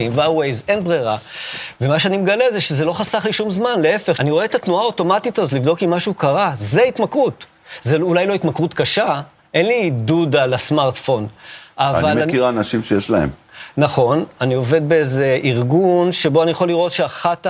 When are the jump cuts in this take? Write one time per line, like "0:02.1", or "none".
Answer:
0:04.1